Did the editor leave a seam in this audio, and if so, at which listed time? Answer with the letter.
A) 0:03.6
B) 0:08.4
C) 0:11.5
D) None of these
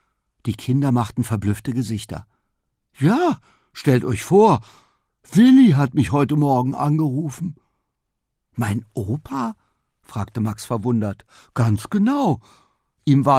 D